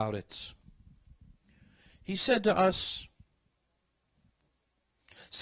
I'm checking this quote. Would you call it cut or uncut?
uncut